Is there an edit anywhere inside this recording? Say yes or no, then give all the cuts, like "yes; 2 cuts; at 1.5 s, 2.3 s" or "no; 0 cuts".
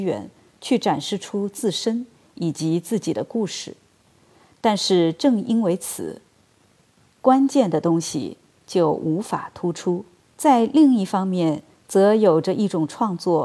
yes; 1 cut; at 10.2 s